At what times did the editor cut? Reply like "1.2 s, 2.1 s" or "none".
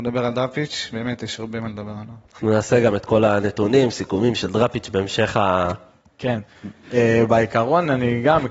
none